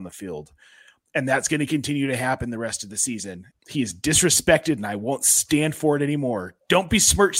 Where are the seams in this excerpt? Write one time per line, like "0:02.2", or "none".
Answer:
0:03.5